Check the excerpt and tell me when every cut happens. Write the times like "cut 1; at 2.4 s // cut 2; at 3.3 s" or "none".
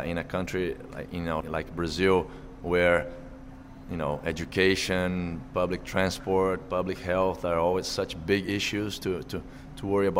cut 1; at 1.4 s